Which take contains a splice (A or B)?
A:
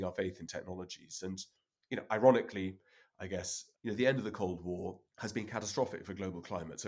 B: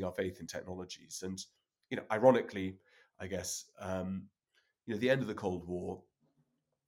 A